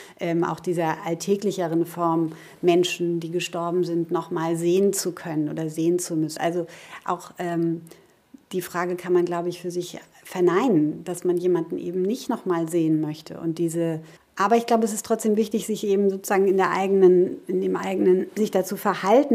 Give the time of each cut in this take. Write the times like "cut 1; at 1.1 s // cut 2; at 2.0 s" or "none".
cut 1; at 6.4 s // cut 2; at 14.2 s